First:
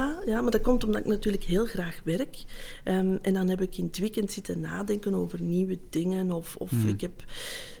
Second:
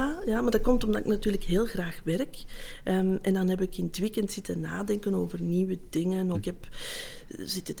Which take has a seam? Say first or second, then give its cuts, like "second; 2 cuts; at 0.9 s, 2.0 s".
second; 1 cut; at 6.3 s